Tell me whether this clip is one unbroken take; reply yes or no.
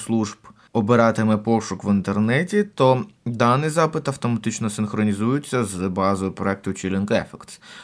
yes